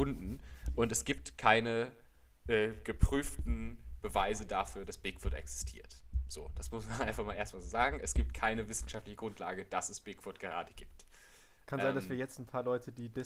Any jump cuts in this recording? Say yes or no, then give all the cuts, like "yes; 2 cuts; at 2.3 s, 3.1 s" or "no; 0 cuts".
no; 0 cuts